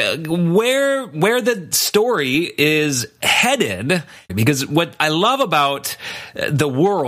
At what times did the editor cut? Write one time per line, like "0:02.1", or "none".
0:04.3